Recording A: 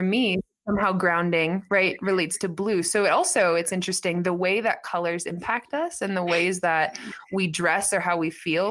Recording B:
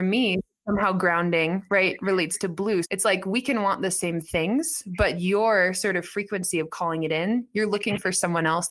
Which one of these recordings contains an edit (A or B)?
B